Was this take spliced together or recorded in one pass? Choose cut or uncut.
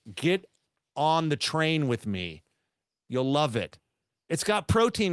uncut